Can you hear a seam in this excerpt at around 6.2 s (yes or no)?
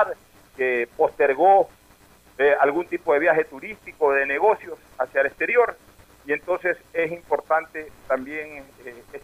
no